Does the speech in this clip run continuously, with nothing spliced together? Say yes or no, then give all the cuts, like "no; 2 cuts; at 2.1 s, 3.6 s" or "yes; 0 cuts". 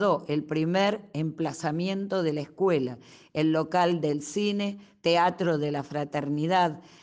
yes; 0 cuts